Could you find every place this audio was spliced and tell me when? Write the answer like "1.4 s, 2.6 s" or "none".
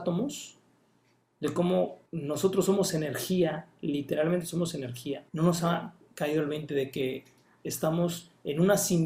2.1 s, 5.3 s

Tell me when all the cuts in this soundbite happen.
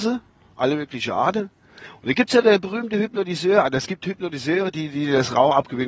none

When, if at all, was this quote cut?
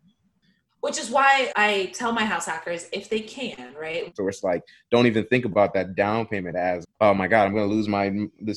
1.5 s, 4.1 s, 6.8 s

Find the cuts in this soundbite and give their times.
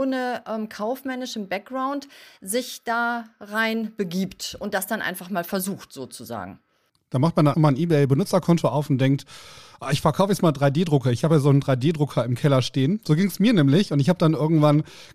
7.5 s

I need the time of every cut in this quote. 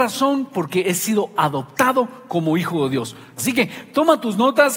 3.4 s

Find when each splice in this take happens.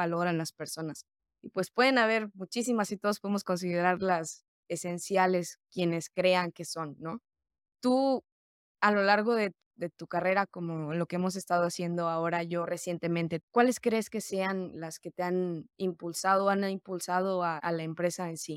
13.4 s, 17.6 s

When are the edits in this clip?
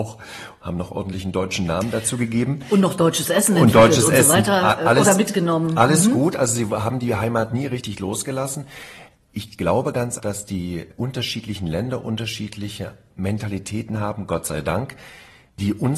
10.2 s

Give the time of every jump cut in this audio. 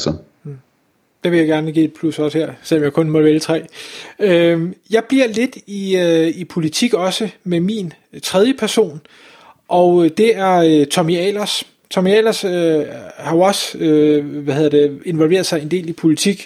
none

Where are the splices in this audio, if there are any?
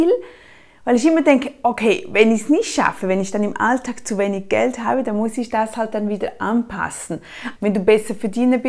7.5 s

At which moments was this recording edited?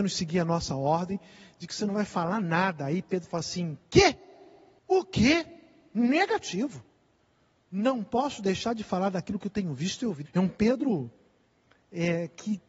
10.2 s

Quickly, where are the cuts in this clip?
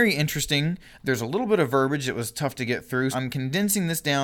3.1 s

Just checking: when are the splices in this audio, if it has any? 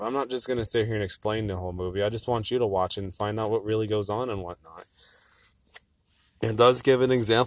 none

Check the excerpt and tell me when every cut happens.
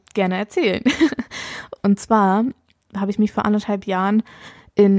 1.8 s

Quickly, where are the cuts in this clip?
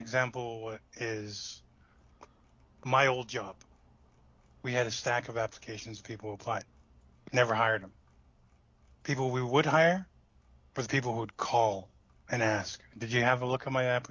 none

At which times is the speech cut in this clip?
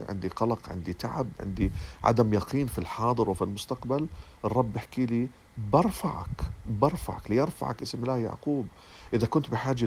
none

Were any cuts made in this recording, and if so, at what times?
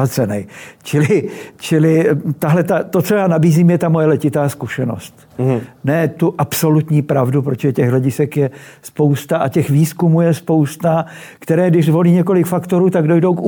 none

